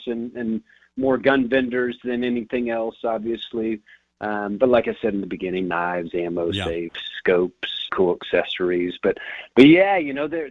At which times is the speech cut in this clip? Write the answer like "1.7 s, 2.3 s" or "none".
7.9 s